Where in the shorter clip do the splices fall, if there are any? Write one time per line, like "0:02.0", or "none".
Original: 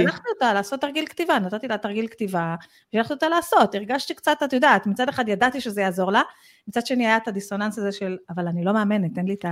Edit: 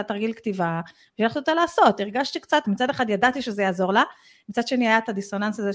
0:02.6